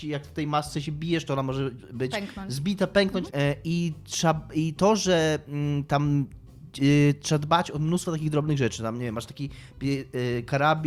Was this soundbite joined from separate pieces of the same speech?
yes; 1 cut; at 3.3 s

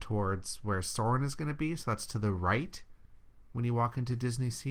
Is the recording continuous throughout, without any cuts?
yes; 0 cuts

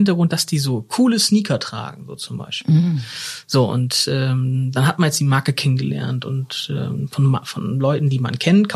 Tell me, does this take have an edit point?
no; 0 cuts

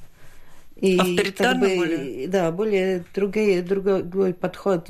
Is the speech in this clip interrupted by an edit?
no; 0 cuts

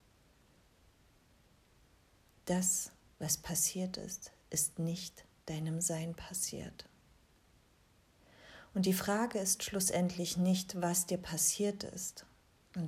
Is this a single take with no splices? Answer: yes; 0 cuts

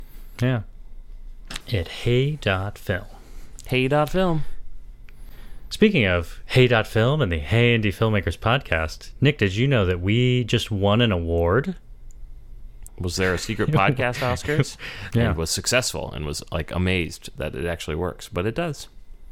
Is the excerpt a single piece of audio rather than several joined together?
no; 3 cuts; at 1.6 s, 12.9 s, 15.1 s

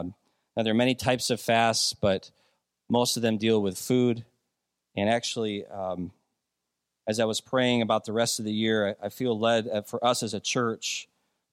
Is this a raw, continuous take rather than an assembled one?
yes; 0 cuts

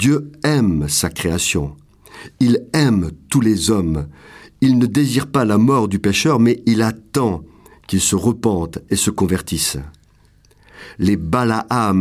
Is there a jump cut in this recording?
no; 0 cuts

